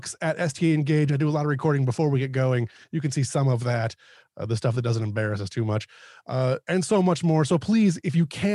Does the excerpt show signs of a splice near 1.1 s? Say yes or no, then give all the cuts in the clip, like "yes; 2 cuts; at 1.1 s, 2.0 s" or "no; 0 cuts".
no; 0 cuts